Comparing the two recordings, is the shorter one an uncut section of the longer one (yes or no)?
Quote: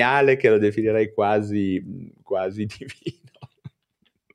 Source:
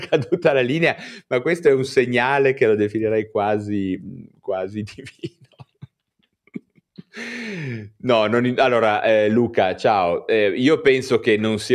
yes